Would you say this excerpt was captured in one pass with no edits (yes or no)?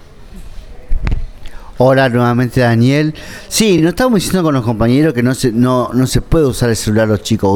yes